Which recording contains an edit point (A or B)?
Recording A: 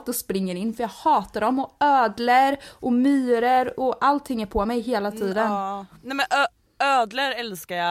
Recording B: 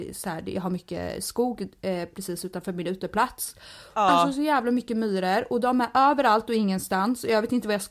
B